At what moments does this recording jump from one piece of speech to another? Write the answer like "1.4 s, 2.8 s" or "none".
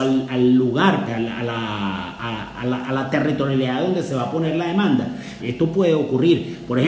1.1 s, 5.4 s